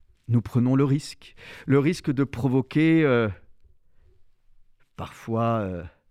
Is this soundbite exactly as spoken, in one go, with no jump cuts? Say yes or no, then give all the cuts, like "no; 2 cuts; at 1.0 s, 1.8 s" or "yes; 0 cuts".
no; 1 cut; at 4.8 s